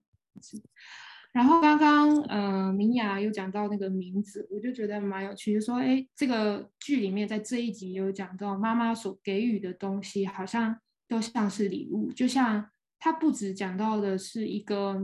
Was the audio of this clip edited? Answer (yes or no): no